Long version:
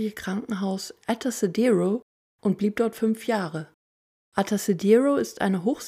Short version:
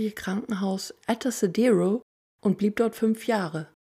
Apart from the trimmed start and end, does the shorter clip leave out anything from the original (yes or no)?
no